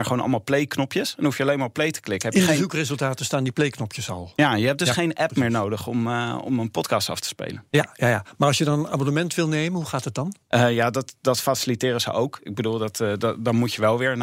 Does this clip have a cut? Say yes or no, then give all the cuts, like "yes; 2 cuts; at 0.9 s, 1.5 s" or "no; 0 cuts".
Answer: yes; 1 cut; at 10.4 s